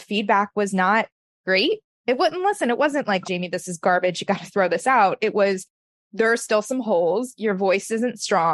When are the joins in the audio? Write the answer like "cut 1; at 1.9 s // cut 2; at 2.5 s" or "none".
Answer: cut 1; at 3.2 s